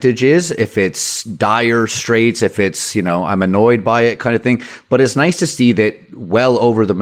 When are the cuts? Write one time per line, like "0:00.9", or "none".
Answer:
none